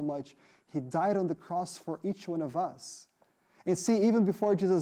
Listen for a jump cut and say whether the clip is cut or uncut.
uncut